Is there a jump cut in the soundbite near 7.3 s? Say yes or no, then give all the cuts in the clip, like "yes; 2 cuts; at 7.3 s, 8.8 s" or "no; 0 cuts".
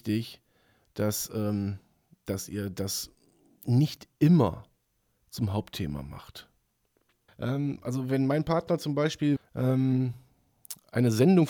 yes; 2 cuts; at 7.3 s, 9.4 s